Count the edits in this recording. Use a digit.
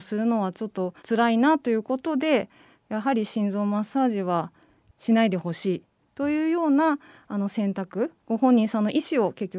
2